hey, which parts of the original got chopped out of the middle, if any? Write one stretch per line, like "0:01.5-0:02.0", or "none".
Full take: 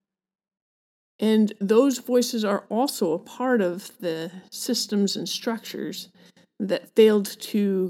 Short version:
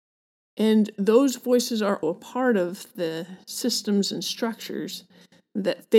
0:02.7-0:03.1